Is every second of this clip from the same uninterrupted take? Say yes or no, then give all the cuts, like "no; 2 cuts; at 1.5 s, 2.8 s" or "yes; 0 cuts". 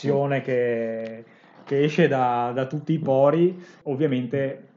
yes; 0 cuts